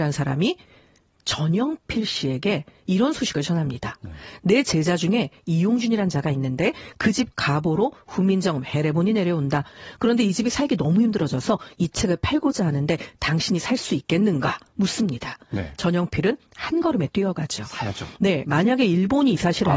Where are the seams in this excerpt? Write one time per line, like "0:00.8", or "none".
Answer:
none